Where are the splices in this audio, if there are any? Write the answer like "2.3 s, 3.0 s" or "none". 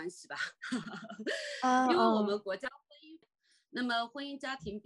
3.2 s